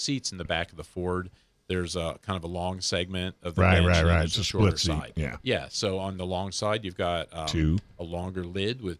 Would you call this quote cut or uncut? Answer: uncut